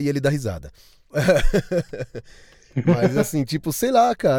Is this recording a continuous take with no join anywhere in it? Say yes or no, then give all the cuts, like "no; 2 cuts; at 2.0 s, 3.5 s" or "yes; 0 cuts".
no; 1 cut; at 1.1 s